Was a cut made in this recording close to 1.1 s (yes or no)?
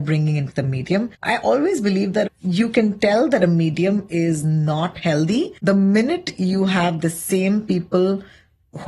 yes